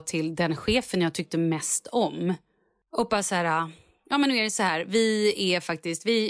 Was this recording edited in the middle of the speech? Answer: no; 0 cuts

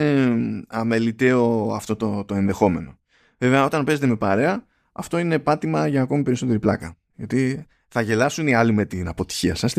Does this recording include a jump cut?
yes; 1 cut; at 7.1 s

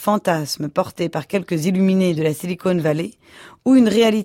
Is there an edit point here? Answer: no; 0 cuts

